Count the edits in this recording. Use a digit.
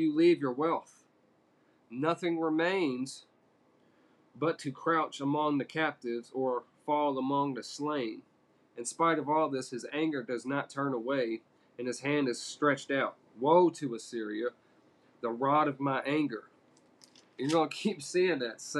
0